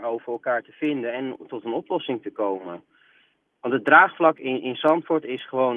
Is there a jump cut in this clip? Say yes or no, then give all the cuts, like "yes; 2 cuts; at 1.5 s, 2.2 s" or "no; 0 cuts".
no; 0 cuts